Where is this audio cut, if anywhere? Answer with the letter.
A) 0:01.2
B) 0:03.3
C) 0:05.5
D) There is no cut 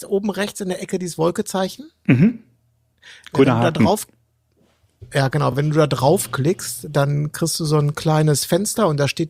D